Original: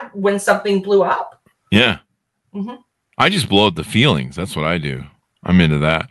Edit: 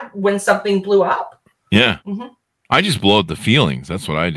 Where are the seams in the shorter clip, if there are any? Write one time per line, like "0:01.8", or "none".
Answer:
0:02.0